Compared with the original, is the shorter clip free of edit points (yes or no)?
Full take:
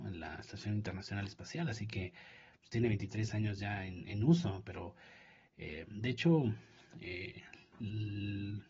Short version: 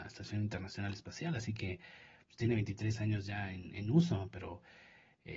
yes